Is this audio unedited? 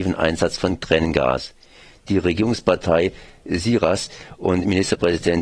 yes; 0 cuts

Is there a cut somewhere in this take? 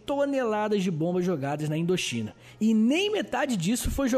no; 0 cuts

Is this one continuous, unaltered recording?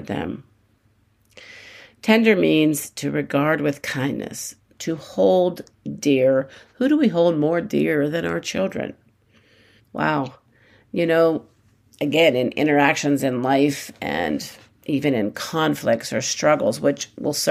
no; 1 cut; at 9.8 s

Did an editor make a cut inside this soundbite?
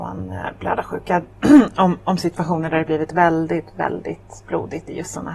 no; 0 cuts

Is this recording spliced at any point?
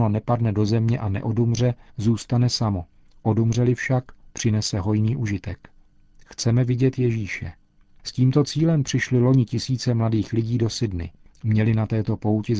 yes; 1 cut; at 6.1 s

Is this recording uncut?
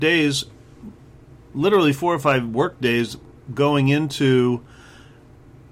yes; 0 cuts

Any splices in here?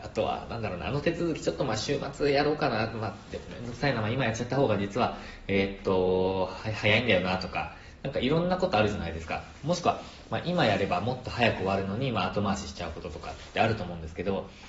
no; 0 cuts

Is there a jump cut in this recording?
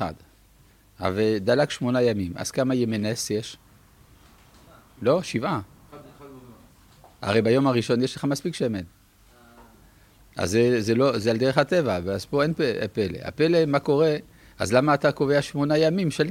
no; 0 cuts

